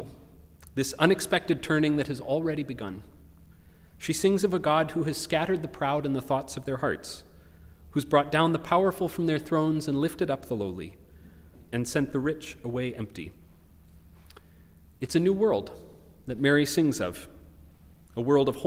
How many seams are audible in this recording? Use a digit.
1